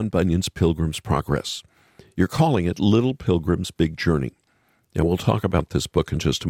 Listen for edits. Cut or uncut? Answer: uncut